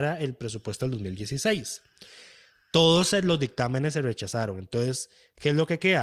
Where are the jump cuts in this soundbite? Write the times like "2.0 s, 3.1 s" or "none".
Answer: none